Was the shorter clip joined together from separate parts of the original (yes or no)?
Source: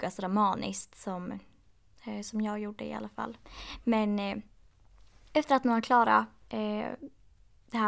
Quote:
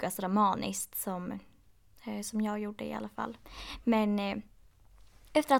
no